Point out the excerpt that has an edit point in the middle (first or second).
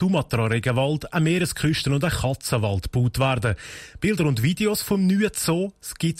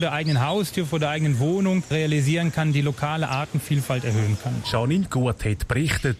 second